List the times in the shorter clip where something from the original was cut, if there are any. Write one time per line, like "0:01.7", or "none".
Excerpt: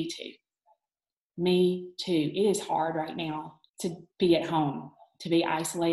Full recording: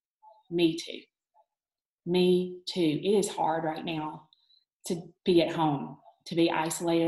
0:03.7

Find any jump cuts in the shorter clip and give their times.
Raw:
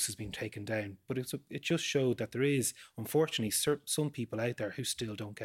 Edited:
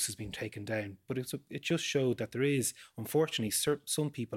none

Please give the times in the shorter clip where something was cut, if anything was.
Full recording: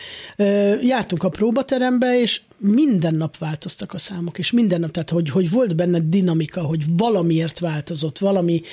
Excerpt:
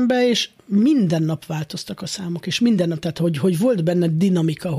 none

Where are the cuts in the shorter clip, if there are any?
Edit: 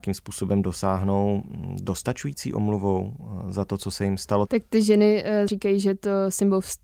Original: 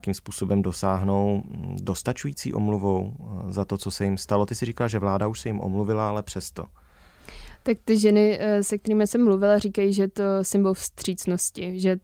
0:04.5
0:05.5

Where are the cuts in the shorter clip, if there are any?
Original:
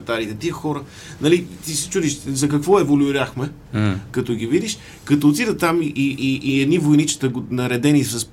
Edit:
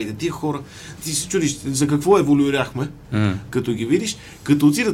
0:01.0

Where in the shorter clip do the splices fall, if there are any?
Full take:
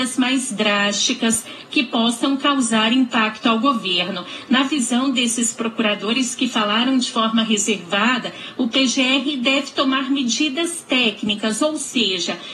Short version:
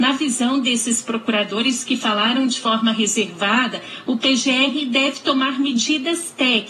none

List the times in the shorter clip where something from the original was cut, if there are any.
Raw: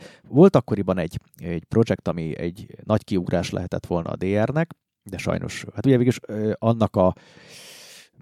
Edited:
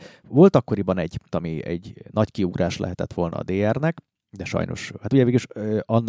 0:01.3

